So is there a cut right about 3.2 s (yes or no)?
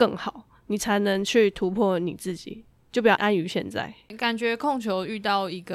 yes